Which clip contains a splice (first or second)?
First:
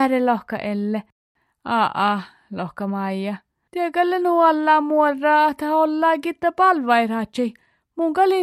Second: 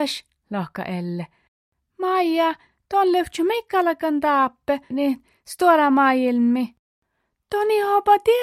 second